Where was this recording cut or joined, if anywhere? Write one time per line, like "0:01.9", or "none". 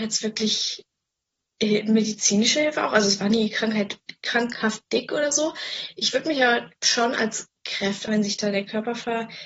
0:08.1